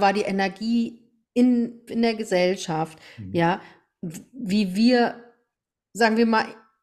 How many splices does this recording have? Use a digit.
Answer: 1